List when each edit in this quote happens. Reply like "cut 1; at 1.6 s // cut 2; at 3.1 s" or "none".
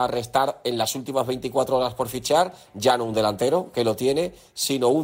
none